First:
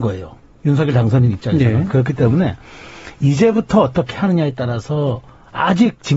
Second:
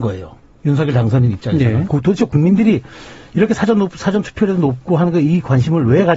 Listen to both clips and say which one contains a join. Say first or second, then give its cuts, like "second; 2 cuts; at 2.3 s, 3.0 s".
second; 1 cut; at 1.9 s